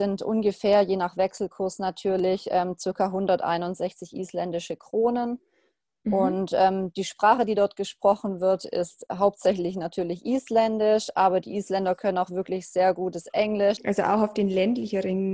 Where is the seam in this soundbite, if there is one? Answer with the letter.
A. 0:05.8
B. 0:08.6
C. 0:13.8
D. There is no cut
C